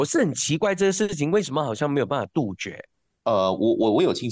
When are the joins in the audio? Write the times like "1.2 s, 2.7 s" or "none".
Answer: none